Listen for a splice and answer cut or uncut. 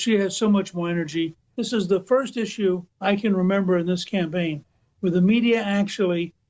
cut